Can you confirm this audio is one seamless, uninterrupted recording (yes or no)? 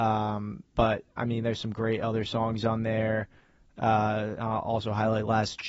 yes